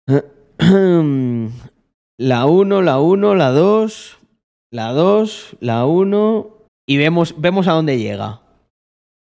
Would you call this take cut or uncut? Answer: cut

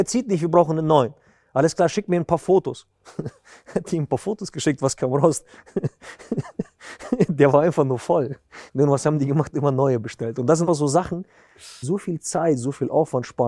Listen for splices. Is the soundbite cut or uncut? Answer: cut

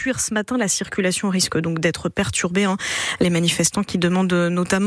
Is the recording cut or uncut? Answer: uncut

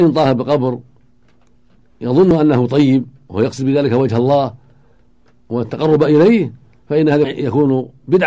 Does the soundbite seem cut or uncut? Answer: cut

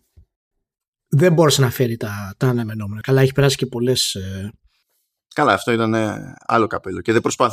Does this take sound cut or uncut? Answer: cut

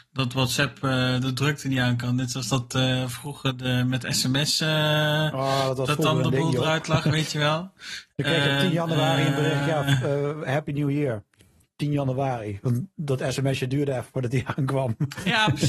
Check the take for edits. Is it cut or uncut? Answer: uncut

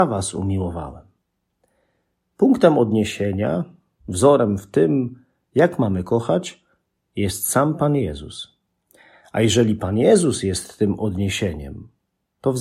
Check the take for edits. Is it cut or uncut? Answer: uncut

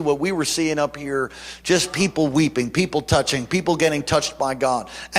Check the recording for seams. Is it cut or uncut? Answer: uncut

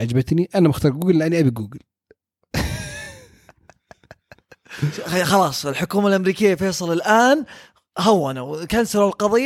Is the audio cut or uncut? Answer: uncut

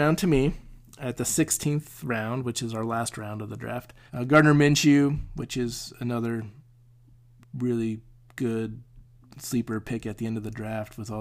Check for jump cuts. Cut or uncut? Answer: cut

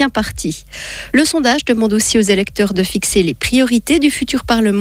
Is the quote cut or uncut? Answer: uncut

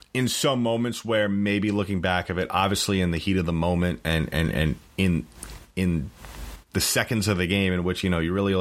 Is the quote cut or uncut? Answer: uncut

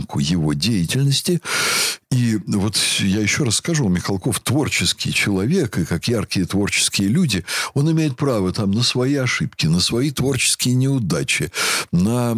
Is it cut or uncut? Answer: uncut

